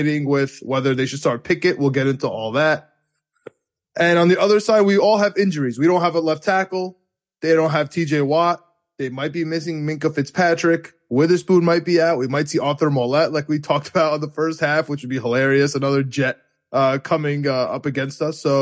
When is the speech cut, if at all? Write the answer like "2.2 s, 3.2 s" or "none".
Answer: none